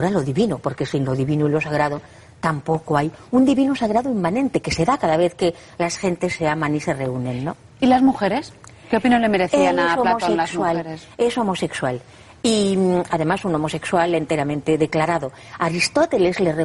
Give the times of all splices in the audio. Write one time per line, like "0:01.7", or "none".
none